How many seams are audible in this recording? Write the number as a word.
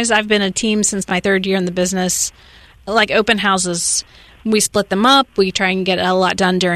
one